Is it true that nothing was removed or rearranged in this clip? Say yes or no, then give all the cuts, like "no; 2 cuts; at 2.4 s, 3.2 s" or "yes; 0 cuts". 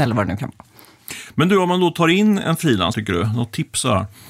no; 1 cut; at 2.9 s